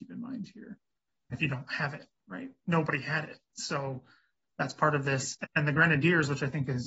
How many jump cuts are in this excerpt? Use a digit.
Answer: 1